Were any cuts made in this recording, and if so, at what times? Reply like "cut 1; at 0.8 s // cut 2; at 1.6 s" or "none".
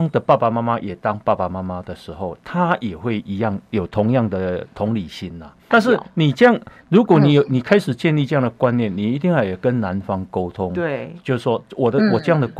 cut 1; at 5.7 s